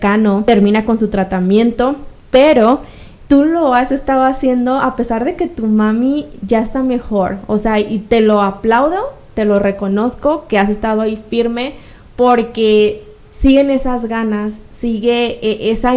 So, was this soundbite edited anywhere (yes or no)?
no